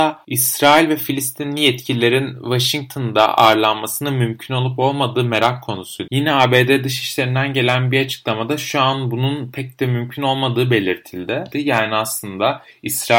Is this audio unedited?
no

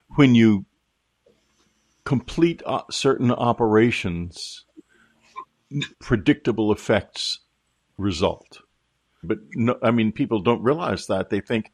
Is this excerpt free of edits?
no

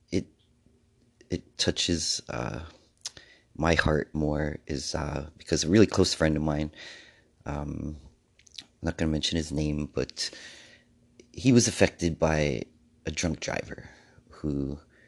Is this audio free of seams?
no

